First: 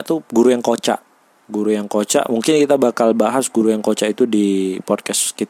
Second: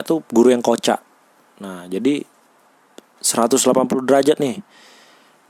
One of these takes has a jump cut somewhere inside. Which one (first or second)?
first